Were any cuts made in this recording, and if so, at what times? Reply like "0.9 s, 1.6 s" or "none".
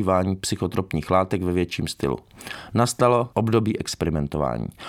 3.3 s